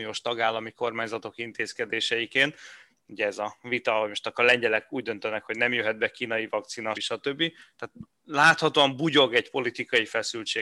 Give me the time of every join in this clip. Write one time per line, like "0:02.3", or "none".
0:06.9